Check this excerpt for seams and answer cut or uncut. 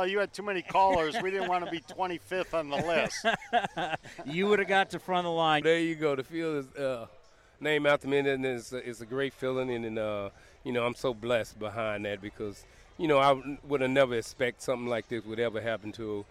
cut